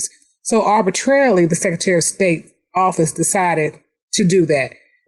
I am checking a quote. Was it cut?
no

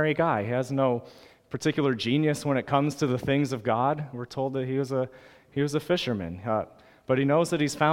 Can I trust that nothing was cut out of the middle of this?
yes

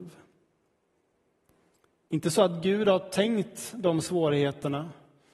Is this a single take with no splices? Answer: yes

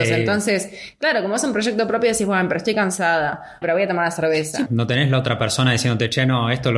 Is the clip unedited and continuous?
no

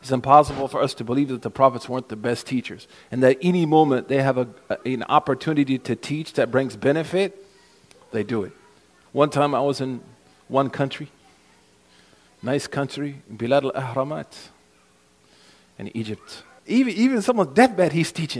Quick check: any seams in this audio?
yes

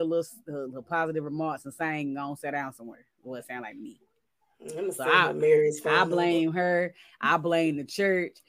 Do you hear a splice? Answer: no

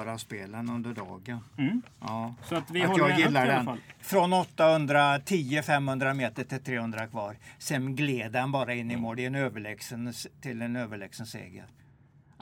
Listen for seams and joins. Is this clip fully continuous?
yes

